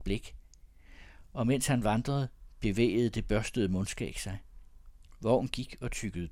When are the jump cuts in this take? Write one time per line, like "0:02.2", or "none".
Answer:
none